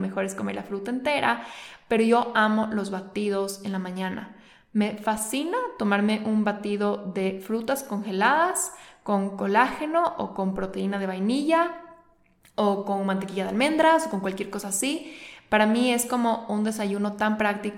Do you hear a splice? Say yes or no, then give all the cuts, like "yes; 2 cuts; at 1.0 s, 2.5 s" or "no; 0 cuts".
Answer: no; 0 cuts